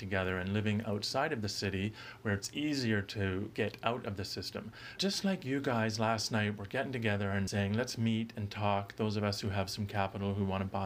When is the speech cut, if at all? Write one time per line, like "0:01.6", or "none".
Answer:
0:05.0
0:07.5